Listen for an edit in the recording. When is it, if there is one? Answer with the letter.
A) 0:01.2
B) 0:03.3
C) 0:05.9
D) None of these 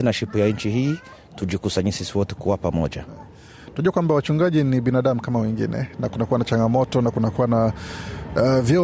D